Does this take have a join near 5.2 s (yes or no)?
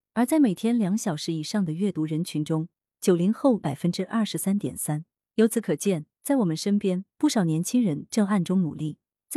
no